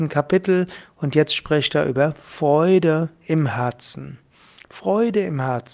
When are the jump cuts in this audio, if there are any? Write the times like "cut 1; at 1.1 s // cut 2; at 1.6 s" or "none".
none